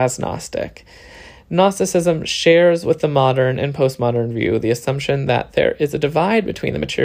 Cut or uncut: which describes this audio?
uncut